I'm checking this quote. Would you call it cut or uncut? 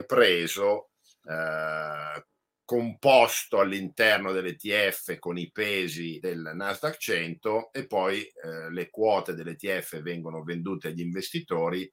cut